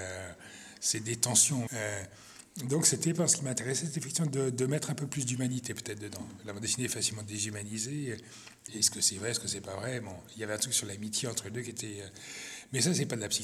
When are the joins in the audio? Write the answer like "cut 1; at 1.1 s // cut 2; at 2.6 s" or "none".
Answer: cut 1; at 1.7 s // cut 2; at 8.7 s

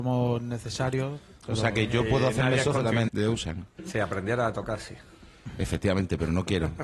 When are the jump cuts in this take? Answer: cut 1; at 3.1 s

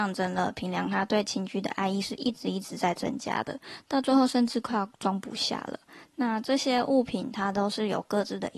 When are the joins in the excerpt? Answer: none

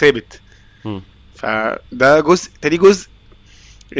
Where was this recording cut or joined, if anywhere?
none

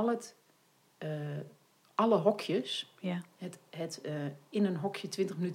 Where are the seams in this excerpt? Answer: none

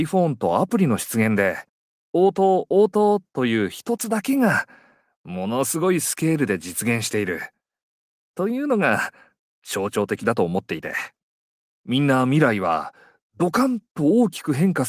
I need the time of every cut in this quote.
cut 1; at 2.0 s // cut 2; at 11.7 s

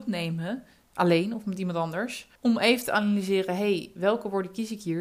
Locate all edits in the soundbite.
cut 1; at 2.4 s

